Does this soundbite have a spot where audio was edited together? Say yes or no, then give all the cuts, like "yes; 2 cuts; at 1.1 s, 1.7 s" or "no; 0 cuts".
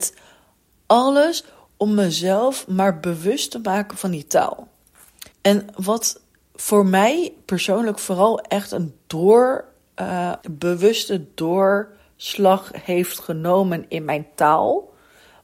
yes; 2 cuts; at 5.3 s, 10.4 s